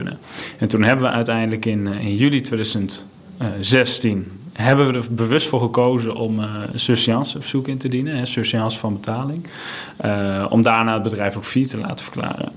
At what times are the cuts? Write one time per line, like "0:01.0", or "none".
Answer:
none